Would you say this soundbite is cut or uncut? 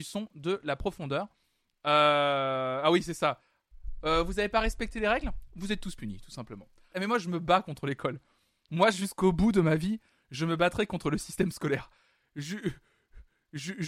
cut